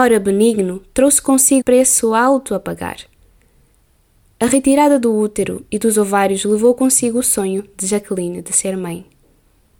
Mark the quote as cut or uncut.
cut